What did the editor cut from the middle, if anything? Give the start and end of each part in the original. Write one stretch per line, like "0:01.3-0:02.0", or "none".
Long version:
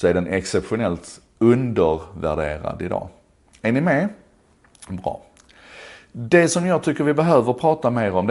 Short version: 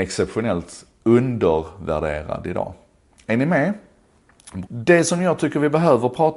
0:05.0-0:06.1